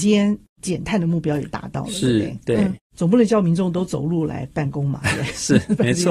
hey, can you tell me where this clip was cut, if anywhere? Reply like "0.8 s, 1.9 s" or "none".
none